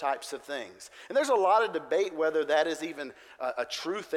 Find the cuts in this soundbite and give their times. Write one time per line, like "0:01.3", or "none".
none